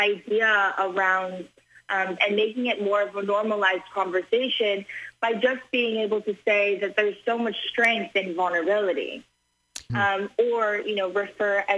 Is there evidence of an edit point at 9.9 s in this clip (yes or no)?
yes